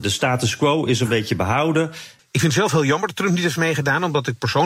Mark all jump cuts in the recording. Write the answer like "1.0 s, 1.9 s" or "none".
2.2 s